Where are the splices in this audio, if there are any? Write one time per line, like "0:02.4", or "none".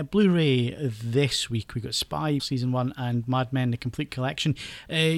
0:02.4